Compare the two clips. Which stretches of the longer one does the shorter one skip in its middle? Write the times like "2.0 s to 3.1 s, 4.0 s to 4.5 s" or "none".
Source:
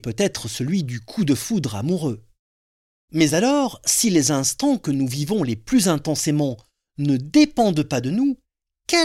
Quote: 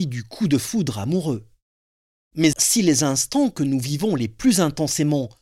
3.3 s to 3.8 s